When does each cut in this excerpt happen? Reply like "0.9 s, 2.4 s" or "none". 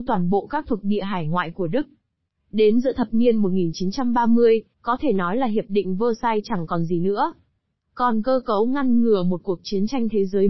2.4 s, 4.7 s

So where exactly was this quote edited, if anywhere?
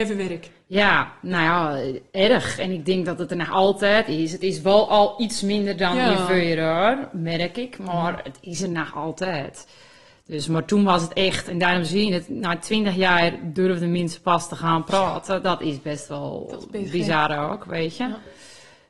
none

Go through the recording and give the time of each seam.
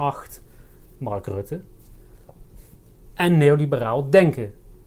none

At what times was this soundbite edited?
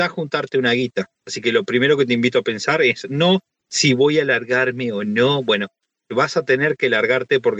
1.1 s

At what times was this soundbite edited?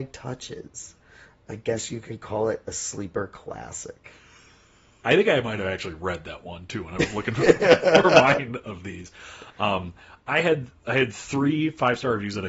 5.0 s

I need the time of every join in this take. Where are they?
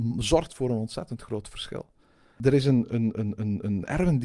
none

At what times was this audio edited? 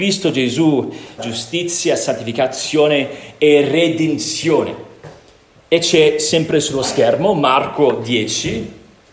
1.2 s, 5.5 s

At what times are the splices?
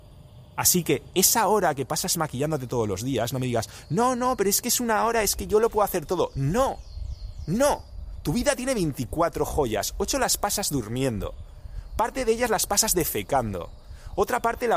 none

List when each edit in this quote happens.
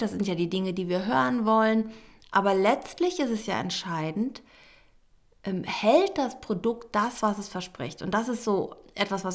none

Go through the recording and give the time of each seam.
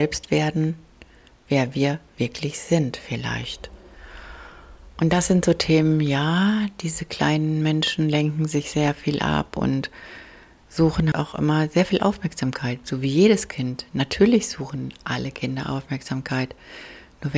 11.1 s

